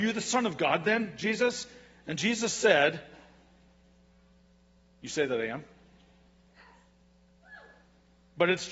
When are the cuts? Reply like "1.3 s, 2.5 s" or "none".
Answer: none